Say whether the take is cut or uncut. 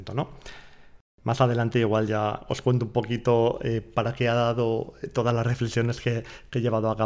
uncut